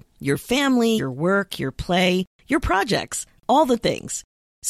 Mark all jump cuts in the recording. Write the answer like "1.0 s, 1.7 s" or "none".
1.0 s